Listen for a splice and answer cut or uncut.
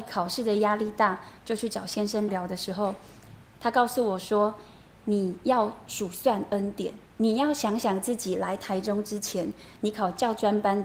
cut